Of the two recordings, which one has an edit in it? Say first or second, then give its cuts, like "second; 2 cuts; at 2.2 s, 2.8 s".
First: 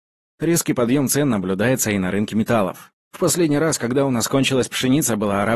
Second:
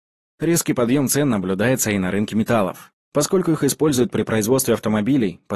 first; 1 cut; at 3.0 s